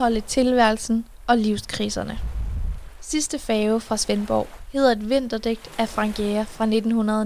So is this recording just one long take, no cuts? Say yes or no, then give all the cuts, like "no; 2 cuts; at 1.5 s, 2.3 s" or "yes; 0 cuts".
yes; 0 cuts